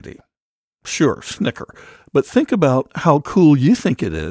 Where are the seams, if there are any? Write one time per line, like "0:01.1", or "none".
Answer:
none